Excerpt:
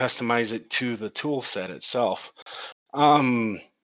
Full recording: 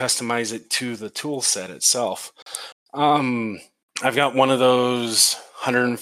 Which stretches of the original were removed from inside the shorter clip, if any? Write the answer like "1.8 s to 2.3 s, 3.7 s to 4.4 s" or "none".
none